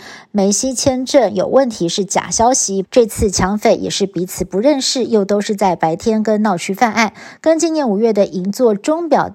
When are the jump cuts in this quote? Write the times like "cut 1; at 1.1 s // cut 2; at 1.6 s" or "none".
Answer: cut 1; at 2.8 s